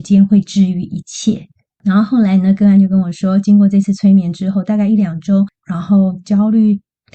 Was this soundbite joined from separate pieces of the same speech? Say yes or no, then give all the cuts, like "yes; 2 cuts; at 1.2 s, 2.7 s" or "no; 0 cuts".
yes; 2 cuts; at 1.7 s, 5.6 s